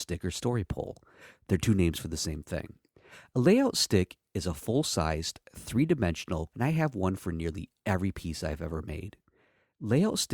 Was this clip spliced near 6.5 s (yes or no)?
yes